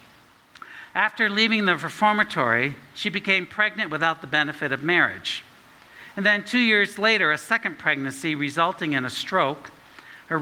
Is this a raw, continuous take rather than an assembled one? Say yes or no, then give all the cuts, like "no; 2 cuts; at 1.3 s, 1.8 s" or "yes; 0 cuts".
yes; 0 cuts